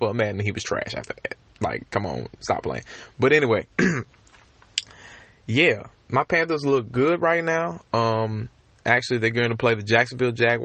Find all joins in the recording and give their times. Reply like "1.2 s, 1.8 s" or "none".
none